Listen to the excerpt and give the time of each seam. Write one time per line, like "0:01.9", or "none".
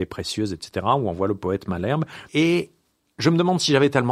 0:02.3